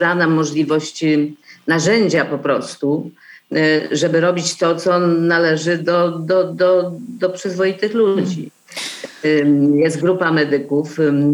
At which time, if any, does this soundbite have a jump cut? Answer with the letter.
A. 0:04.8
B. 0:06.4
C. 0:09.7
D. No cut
D